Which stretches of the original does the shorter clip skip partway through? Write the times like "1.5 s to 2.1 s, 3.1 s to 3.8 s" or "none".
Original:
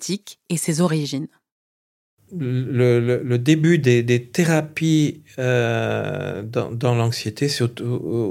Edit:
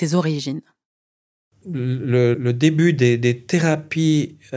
3.0 s to 3.2 s